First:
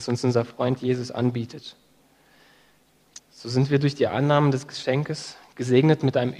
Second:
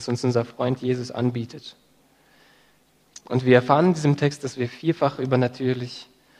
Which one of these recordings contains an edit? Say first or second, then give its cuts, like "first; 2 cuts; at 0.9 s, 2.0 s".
first; 1 cut; at 3.2 s